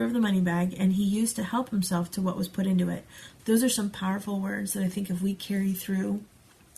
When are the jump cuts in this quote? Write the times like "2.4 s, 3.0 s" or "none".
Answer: 3.4 s